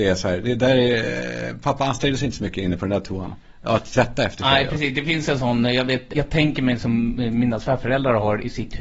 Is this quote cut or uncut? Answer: cut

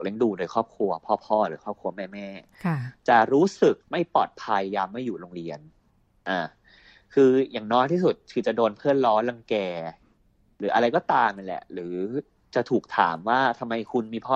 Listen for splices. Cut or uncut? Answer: cut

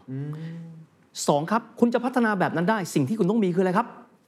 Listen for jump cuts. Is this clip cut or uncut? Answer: uncut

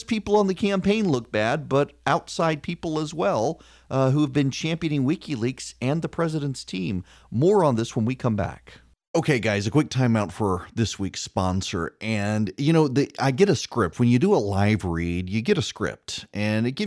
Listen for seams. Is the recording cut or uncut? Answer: uncut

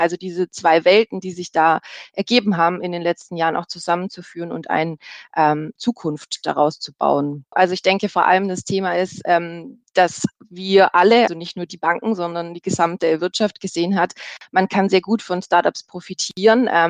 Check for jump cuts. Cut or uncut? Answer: cut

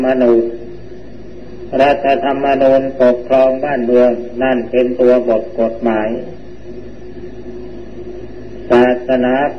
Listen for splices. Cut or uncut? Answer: uncut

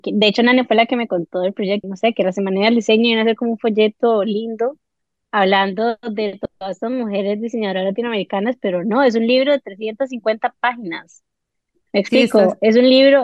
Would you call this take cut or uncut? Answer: cut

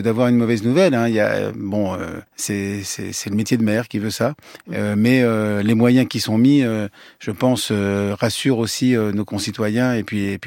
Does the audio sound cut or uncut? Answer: cut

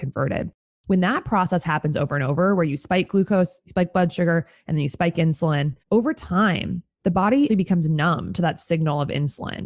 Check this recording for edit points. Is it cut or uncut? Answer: cut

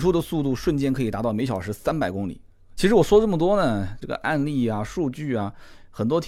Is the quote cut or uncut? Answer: cut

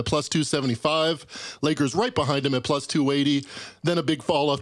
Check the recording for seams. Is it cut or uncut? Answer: uncut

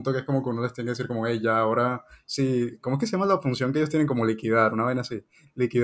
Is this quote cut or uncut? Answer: uncut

